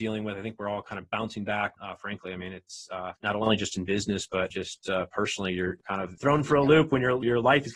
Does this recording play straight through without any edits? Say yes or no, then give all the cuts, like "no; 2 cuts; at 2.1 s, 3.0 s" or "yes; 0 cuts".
no; 1 cut; at 1.8 s